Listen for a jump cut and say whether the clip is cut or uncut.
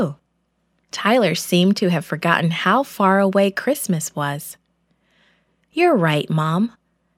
uncut